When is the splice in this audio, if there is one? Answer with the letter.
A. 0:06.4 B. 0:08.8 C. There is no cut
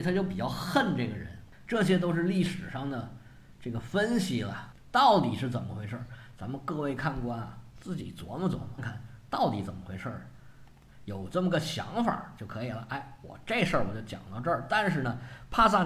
B